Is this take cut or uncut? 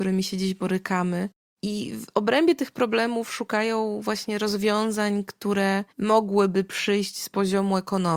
cut